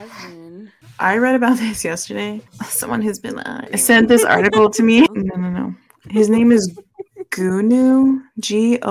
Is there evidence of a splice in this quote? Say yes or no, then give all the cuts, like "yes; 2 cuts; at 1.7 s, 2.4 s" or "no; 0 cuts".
yes; 2 cuts; at 3.7 s, 5.1 s